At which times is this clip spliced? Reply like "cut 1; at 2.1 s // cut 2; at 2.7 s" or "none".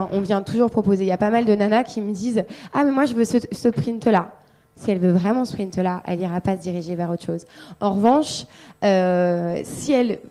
none